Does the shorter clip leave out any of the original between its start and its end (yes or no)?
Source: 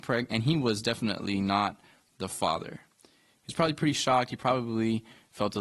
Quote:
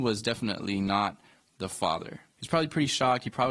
yes